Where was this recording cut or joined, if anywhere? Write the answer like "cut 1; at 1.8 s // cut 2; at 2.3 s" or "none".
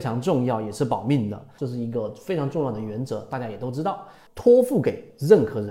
cut 1; at 1.6 s // cut 2; at 4.3 s